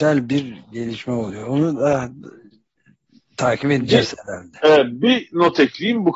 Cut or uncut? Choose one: uncut